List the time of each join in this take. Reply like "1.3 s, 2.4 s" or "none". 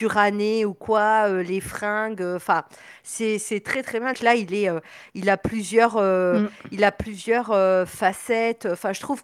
4.1 s